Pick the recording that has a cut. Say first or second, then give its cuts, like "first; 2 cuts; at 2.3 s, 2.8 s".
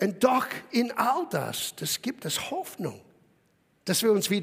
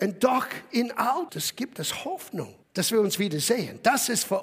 second; 2 cuts; at 1.3 s, 2.6 s